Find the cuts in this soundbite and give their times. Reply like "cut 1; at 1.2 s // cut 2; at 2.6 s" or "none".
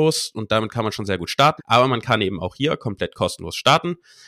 cut 1; at 1.6 s